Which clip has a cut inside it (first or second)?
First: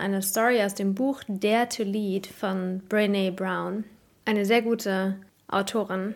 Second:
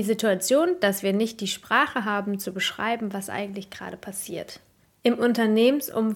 second